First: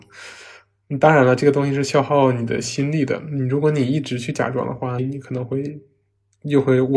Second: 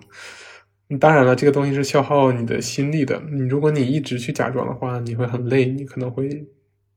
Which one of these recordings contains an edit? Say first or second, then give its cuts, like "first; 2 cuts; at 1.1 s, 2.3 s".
first; 1 cut; at 5.0 s